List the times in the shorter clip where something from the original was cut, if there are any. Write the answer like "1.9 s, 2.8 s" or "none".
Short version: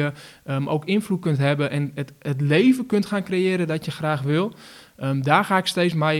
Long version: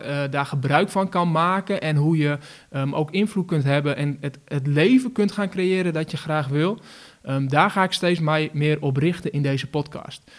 none